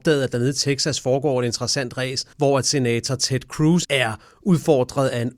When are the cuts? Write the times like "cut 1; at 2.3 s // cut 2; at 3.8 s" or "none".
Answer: cut 1; at 2.3 s // cut 2; at 3.8 s